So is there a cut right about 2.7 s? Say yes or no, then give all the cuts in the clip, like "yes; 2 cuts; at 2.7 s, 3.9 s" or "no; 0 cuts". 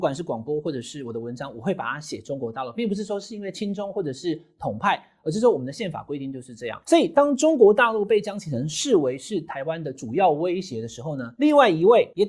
no; 0 cuts